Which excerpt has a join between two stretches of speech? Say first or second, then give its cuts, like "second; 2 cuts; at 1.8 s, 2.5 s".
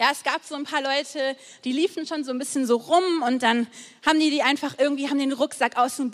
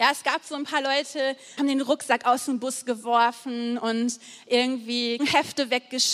second; 2 cuts; at 1.6 s, 5.2 s